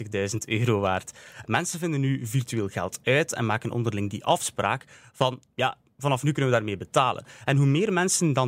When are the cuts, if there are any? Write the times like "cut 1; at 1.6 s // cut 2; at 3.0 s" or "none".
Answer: cut 1; at 1.4 s